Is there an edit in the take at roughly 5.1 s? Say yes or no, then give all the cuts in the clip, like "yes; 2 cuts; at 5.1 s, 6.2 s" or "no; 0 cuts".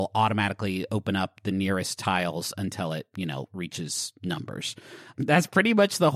yes; 1 cut; at 5.1 s